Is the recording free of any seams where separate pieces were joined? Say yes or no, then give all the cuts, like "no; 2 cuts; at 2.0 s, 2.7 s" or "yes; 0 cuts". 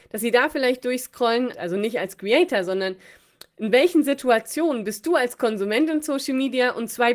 no; 1 cut; at 1.5 s